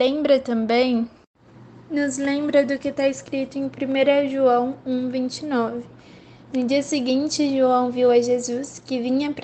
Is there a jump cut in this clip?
no; 0 cuts

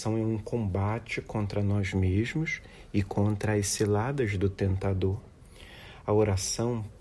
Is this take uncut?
yes; 0 cuts

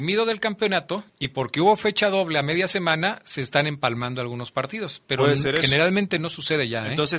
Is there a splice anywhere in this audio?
yes; 1 cut; at 1.1 s

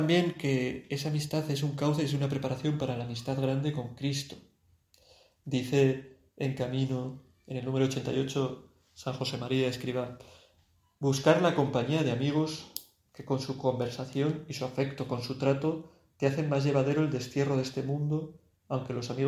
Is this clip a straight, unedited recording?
yes; 0 cuts

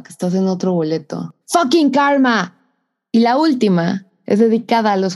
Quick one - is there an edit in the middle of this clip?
yes; 1 cut; at 1.4 s

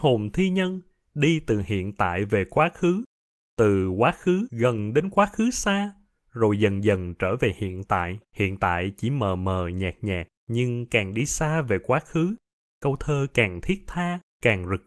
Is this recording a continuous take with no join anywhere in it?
no; 2 cuts; at 8.2 s, 10.4 s

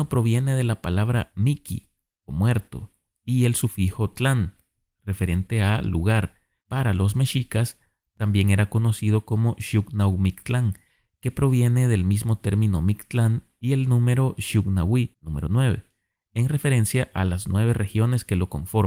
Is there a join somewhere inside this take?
yes; 1 cut; at 6.6 s

